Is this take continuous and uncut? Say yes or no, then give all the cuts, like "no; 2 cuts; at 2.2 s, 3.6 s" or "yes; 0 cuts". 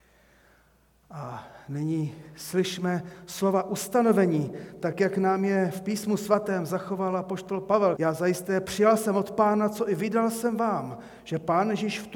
no; 1 cut; at 8.0 s